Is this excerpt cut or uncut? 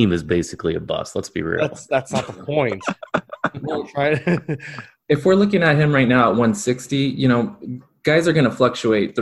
uncut